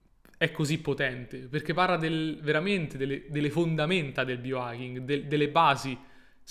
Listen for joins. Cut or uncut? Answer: uncut